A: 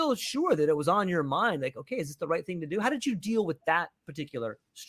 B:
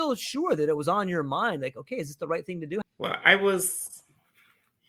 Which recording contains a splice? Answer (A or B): B